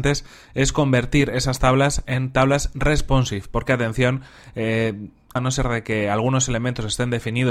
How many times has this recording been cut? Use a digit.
1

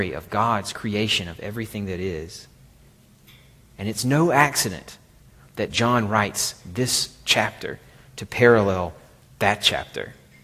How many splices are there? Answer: 0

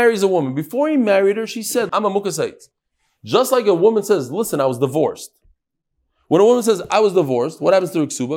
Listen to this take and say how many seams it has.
1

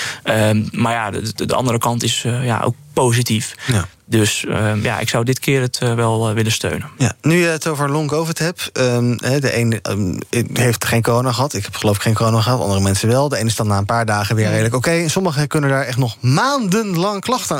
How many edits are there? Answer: 0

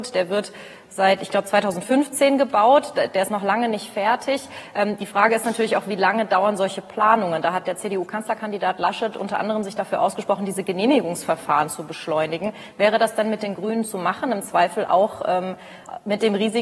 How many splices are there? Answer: 0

